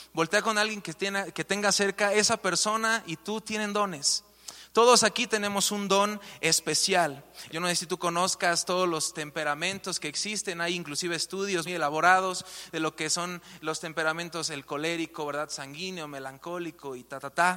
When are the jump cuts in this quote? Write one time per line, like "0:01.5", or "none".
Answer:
0:07.5
0:11.7